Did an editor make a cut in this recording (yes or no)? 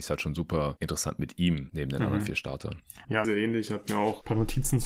yes